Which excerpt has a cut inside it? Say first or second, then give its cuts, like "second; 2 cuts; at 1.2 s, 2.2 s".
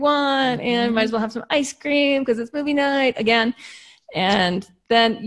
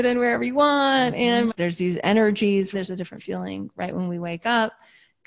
second; 2 cuts; at 1.5 s, 2.7 s